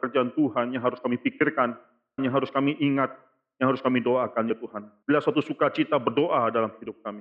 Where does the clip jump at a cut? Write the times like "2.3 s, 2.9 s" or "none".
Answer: 2.2 s, 5.0 s